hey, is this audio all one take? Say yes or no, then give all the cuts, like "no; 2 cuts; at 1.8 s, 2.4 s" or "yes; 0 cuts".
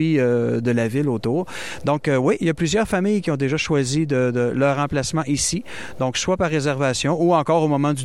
yes; 0 cuts